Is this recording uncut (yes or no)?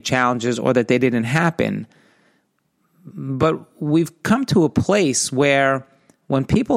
yes